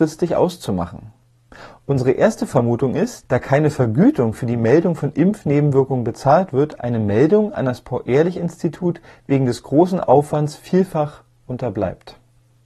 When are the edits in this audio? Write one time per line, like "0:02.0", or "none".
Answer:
0:03.2

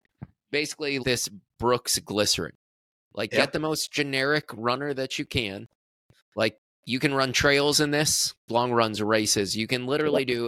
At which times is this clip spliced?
0:01.0
0:08.5

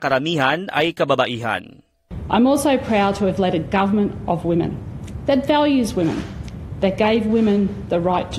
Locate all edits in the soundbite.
none

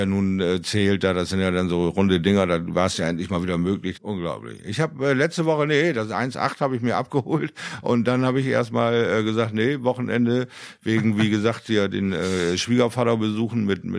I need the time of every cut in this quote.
0:03.9

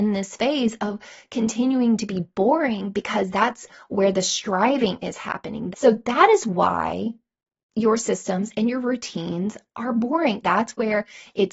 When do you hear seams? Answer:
0:05.7
0:10.4

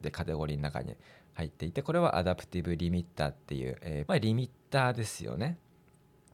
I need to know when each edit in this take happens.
0:04.1

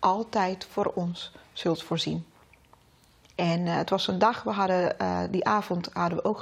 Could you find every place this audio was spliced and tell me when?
none

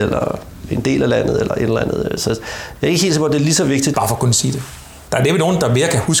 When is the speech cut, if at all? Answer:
0:03.9

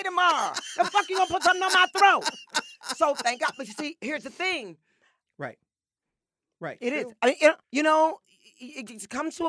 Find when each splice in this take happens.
0:05.3
0:07.6

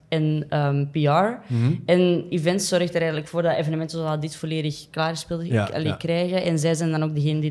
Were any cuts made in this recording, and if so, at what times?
none

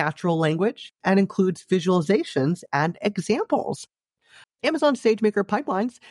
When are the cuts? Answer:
0:04.4

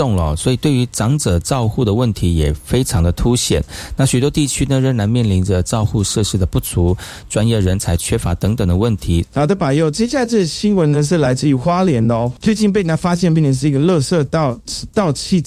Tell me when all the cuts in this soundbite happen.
0:09.2
0:12.4

